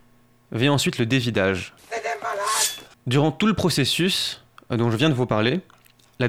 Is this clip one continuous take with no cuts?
no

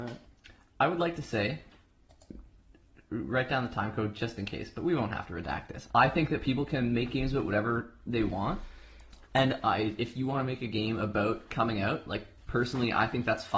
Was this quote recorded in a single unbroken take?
no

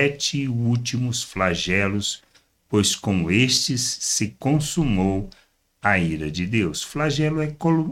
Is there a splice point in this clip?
no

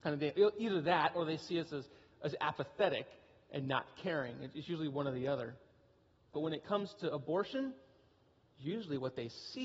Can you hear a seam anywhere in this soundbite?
yes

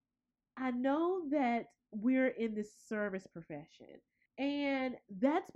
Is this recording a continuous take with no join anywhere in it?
no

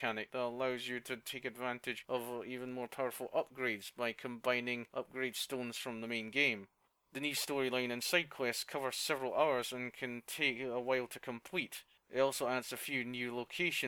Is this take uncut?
yes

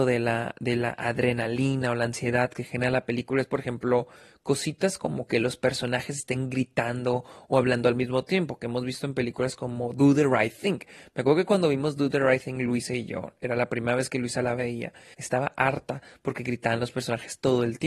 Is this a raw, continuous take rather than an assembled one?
no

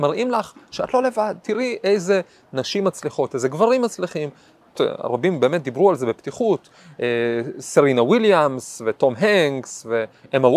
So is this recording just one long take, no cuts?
no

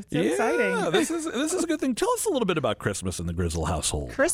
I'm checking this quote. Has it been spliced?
no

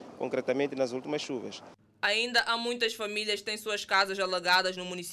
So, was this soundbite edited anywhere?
no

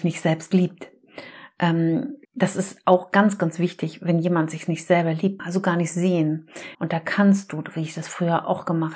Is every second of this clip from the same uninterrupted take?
no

